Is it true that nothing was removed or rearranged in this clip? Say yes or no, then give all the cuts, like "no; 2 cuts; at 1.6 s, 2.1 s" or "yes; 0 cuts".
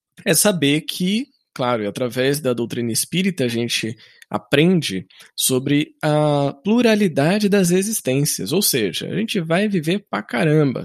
yes; 0 cuts